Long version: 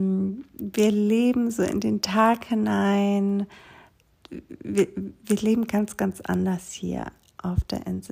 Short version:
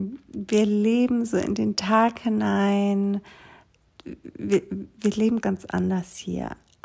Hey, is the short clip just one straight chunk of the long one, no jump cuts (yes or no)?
no